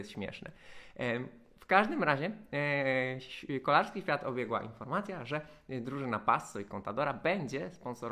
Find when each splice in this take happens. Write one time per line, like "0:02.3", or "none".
none